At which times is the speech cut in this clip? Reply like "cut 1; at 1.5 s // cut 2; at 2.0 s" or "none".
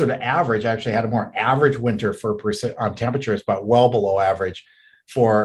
none